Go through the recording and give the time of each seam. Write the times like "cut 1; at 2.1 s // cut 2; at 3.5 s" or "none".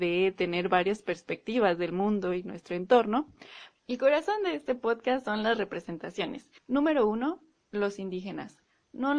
cut 1; at 3.7 s // cut 2; at 6.6 s